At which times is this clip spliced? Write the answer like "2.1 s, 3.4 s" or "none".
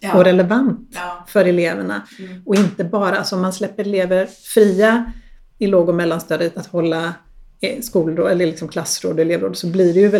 6.5 s